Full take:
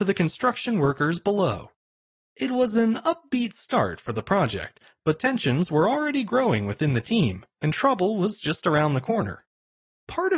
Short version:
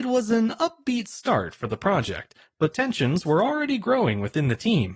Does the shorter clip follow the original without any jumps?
yes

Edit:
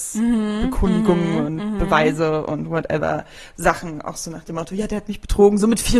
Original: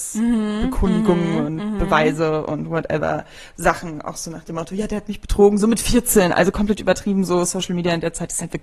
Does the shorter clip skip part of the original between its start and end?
no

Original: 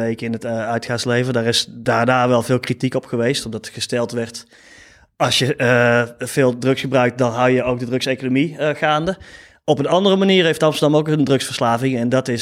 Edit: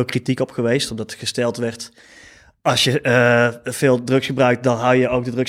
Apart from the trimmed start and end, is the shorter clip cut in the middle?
no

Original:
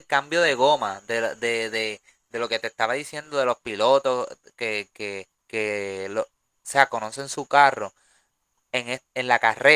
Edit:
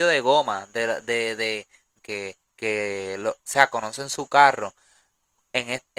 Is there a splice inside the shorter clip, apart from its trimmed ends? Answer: yes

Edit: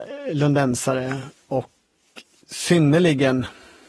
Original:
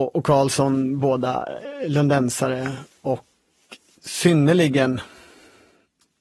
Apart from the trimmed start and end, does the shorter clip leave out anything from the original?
no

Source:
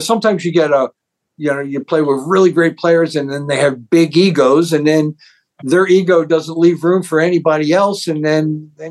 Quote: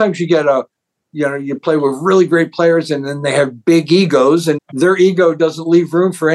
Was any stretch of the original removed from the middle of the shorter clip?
yes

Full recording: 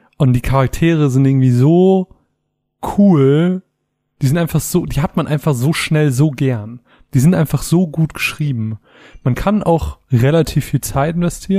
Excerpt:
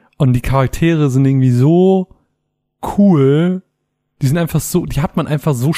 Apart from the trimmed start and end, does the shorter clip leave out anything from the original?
no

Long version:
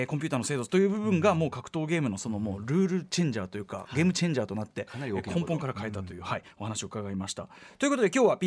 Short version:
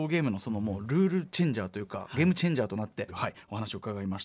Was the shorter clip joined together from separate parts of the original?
yes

